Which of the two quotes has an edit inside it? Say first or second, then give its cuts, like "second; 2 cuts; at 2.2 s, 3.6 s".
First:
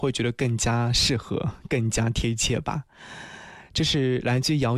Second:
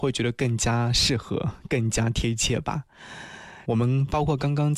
second; 1 cut; at 3.6 s